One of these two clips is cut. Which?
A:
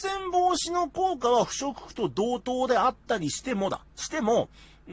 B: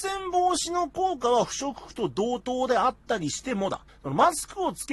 B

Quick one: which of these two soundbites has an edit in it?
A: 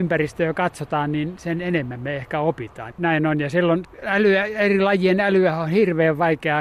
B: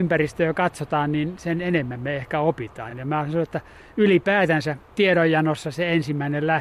A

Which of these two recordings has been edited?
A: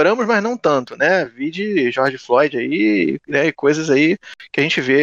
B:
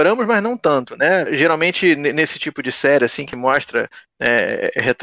B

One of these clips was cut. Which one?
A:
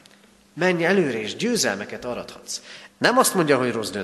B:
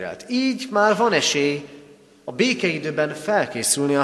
A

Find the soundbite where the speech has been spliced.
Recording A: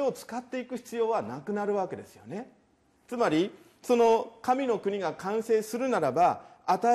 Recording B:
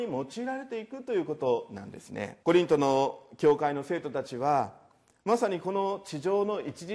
B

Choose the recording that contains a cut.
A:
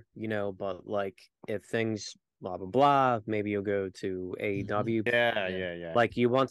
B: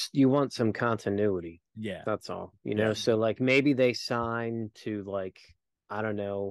A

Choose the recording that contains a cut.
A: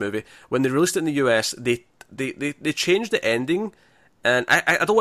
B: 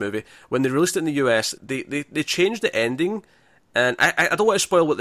B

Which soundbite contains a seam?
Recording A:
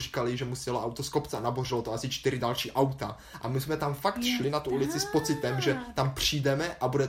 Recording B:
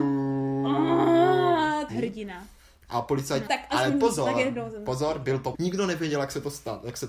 B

